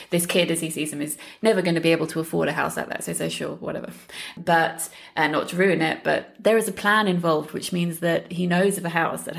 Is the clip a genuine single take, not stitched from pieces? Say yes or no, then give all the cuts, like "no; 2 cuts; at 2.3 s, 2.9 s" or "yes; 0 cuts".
yes; 0 cuts